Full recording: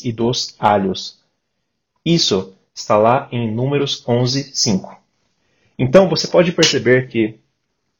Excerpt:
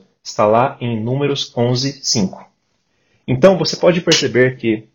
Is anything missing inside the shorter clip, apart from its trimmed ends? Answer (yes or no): no